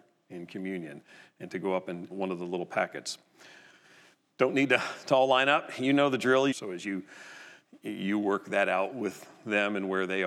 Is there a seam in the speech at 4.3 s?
no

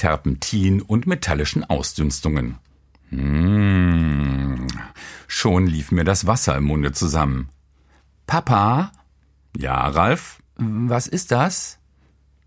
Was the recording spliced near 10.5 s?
yes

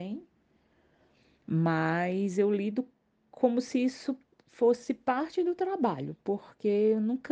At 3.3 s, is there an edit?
no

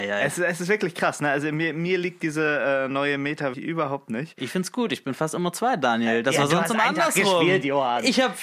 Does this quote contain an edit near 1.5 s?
no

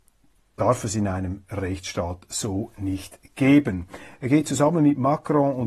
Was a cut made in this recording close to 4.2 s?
yes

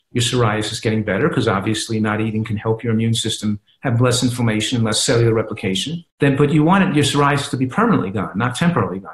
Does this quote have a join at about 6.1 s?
yes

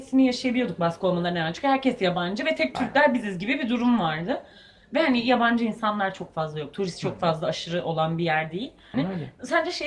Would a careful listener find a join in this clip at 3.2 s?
no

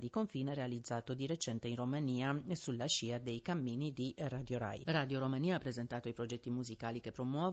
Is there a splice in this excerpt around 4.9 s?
yes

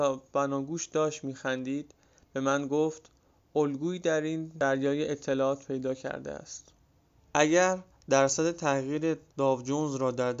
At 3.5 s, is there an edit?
no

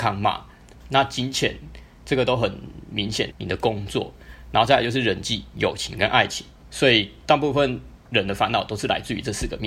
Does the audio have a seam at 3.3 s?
yes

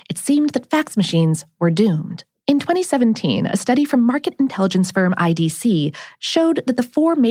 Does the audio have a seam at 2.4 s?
yes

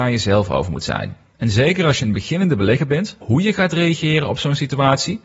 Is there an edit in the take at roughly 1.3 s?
no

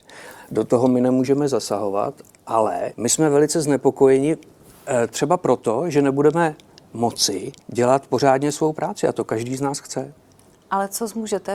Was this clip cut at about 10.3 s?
no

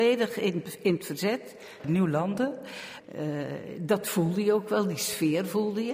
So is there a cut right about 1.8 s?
yes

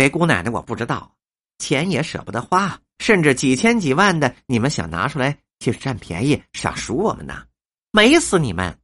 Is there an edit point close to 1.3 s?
no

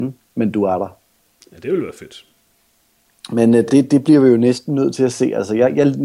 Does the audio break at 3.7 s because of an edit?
no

